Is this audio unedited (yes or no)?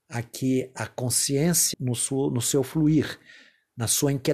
no